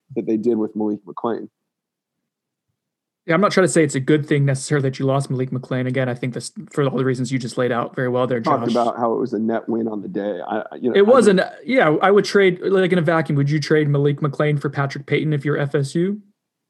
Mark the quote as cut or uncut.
uncut